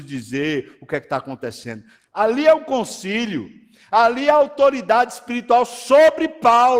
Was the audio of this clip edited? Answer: yes; 1 cut; at 2.0 s

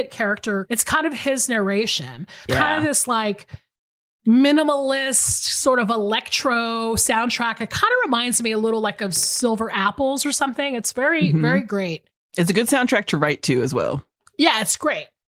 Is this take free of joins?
no; 1 cut; at 2.5 s

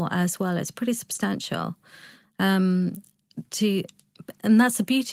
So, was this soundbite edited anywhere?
no; 0 cuts

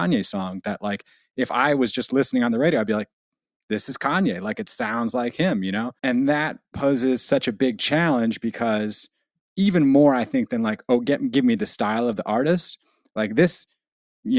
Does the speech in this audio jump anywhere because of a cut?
yes; 1 cut; at 6.0 s

